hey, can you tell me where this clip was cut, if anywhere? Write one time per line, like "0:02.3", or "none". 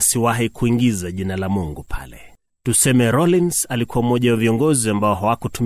0:02.5